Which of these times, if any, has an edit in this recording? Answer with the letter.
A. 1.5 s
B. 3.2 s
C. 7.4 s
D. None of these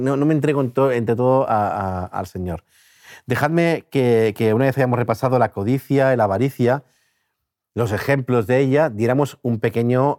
D